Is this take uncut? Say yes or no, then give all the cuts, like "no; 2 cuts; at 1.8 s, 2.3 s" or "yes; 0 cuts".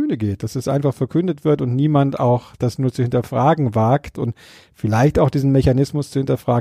no; 1 cut; at 4.2 s